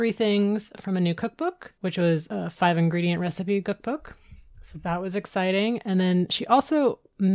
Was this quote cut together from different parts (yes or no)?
no